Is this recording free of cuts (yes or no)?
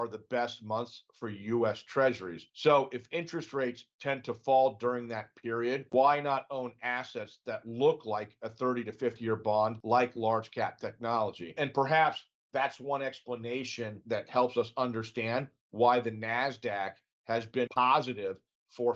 yes